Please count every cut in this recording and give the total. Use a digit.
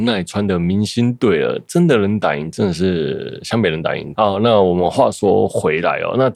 1